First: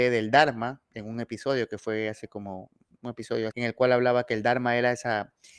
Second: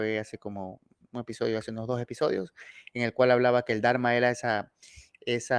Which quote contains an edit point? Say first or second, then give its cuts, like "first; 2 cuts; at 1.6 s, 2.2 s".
first; 1 cut; at 3.5 s